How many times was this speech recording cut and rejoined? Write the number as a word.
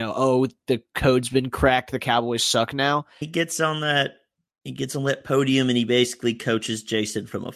one